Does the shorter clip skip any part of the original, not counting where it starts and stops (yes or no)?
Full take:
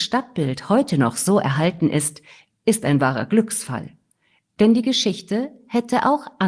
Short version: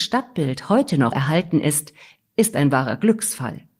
yes